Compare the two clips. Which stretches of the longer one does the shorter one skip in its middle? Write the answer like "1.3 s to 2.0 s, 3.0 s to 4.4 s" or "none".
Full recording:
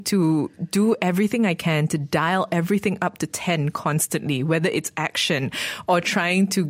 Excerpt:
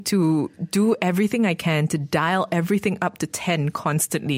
none